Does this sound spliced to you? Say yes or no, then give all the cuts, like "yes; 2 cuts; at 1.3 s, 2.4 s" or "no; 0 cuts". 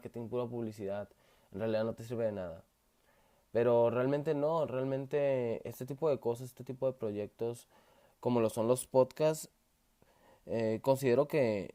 no; 0 cuts